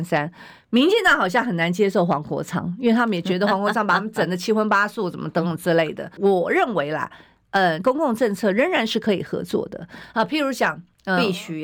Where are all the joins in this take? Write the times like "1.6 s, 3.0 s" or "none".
6.2 s, 7.8 s

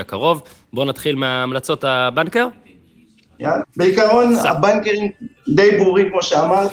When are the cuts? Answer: 3.6 s, 5.4 s

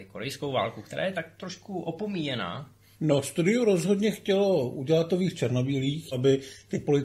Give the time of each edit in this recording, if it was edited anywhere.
2.9 s, 6.1 s

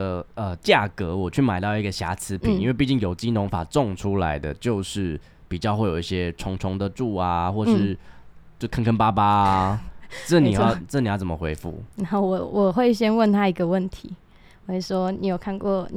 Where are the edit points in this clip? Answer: none

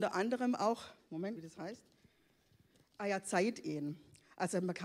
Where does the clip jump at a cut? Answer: 1.4 s

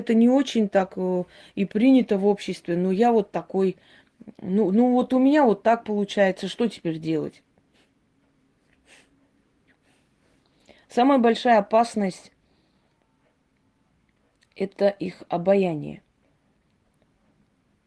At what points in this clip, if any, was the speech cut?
none

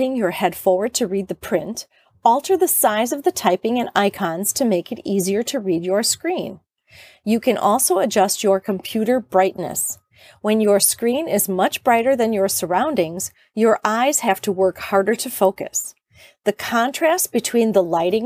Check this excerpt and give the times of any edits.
none

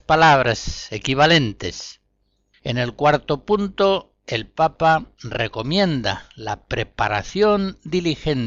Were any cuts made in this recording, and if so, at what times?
2.6 s

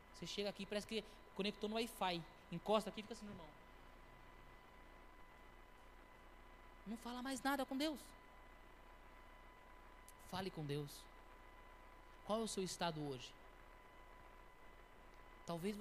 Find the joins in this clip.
none

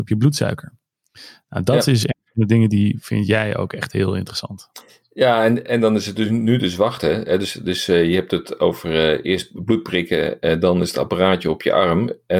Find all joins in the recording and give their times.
5.6 s

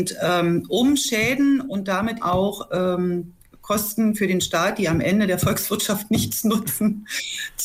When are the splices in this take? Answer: 2.2 s

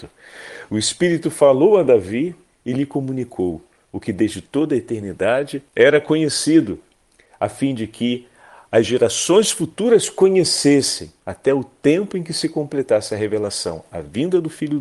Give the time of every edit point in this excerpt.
5.7 s, 11.2 s

